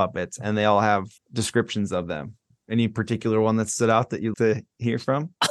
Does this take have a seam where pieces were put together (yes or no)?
yes